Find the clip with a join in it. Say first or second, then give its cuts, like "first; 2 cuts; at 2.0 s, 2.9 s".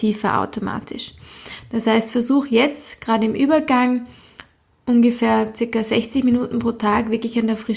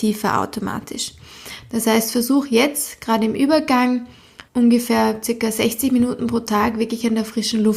second; 1 cut; at 4.5 s